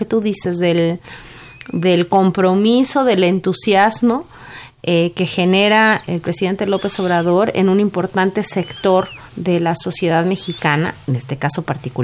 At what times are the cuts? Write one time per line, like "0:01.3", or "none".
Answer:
0:06.0
0:09.3